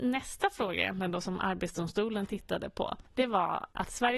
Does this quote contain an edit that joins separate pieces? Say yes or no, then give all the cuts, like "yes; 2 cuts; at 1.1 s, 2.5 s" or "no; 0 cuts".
yes; 1 cut; at 3.1 s